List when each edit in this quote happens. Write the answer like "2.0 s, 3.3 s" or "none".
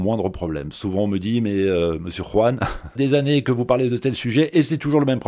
2.9 s